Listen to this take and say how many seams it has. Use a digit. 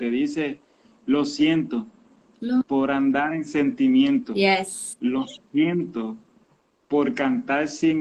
0